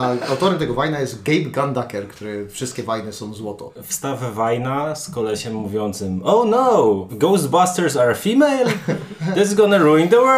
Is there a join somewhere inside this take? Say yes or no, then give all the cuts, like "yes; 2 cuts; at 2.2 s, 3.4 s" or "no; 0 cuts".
yes; 1 cut; at 3.8 s